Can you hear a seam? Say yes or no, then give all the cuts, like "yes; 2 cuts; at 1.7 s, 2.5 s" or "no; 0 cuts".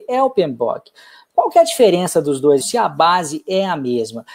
yes; 1 cut; at 2.6 s